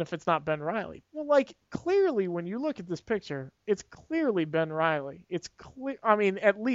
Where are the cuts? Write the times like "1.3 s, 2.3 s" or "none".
1.0 s